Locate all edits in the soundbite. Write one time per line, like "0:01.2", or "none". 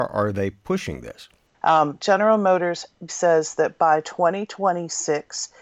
0:01.5
0:03.1